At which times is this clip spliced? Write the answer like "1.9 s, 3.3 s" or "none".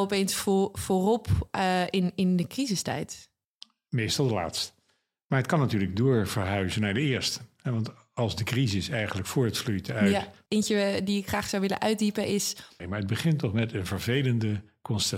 10.5 s, 12.8 s